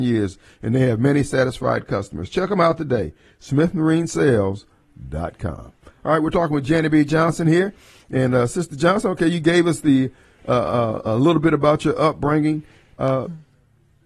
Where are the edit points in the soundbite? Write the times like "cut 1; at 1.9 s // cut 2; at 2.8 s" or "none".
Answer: none